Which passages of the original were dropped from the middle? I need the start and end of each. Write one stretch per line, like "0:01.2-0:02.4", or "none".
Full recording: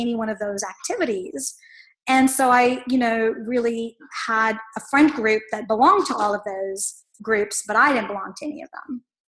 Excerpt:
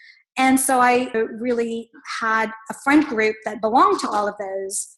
0:02.8-0:03.2